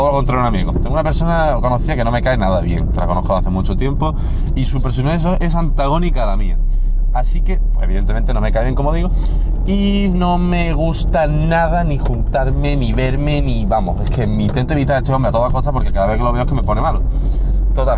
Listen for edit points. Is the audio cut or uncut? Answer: uncut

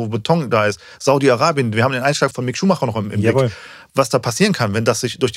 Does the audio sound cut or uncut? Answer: uncut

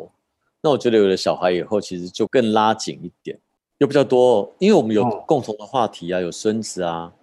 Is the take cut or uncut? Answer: cut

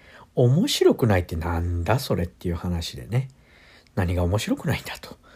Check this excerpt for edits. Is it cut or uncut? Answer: uncut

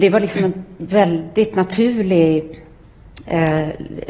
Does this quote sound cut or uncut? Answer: uncut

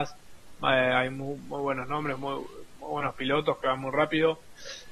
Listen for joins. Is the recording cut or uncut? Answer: uncut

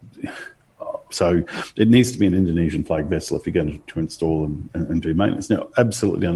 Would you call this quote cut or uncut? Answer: cut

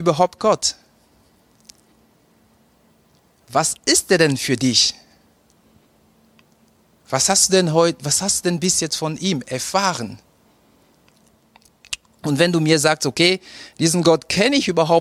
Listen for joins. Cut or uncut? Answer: uncut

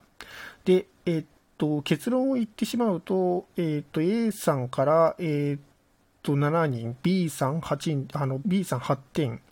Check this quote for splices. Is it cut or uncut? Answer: cut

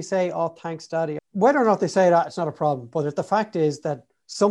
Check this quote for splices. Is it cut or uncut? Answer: cut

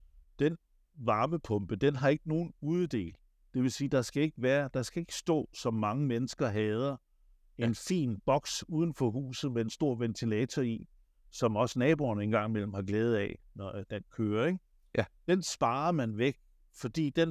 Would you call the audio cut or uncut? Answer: uncut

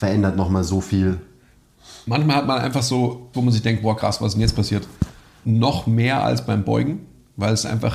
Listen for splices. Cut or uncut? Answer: cut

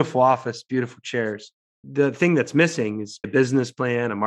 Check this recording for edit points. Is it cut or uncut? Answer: cut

